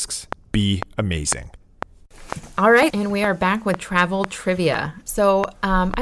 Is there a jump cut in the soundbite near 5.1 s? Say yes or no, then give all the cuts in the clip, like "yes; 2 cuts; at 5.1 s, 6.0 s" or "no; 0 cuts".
yes; 2 cuts; at 2.9 s, 5.1 s